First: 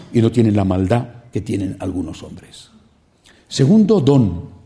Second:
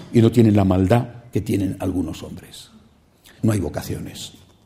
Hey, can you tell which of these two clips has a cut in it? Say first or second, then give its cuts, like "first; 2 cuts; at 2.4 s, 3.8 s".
second; 1 cut; at 3.4 s